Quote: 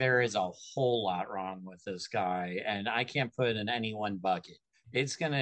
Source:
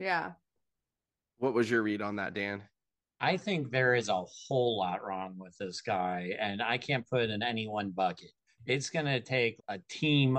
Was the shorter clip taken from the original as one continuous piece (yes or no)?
yes